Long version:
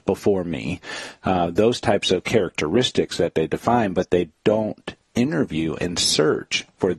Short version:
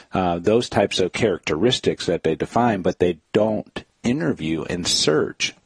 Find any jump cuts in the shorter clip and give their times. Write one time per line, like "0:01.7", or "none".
none